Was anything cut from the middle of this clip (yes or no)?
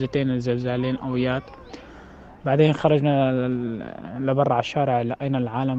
no